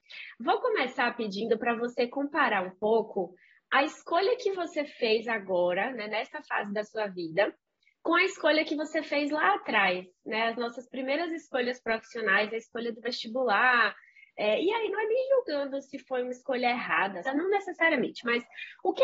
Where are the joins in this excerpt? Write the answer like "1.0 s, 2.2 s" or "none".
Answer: 17.2 s